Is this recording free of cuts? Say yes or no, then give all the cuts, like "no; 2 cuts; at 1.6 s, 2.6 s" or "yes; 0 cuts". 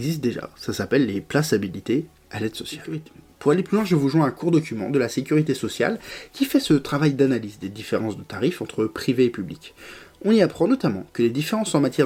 yes; 0 cuts